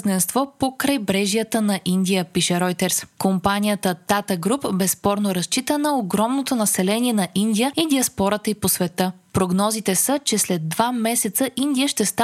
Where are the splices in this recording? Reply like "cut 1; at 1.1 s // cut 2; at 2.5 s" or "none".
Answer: none